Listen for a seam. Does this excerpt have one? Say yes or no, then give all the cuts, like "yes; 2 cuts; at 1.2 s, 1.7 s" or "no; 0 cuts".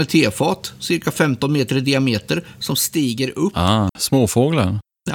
yes; 1 cut; at 3.9 s